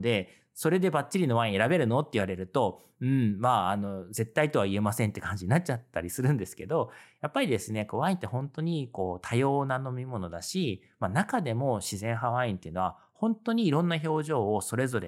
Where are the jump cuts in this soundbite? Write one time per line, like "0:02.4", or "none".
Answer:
none